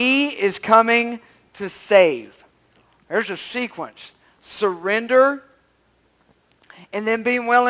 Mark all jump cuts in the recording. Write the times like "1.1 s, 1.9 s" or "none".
none